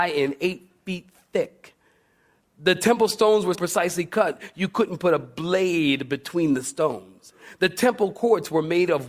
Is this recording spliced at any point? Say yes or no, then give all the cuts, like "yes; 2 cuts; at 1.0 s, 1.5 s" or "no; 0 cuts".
yes; 1 cut; at 3.5 s